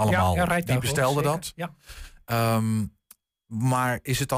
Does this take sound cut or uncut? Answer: uncut